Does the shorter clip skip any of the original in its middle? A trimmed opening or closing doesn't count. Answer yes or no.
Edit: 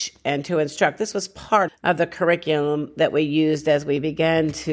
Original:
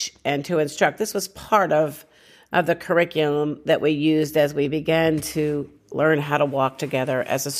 yes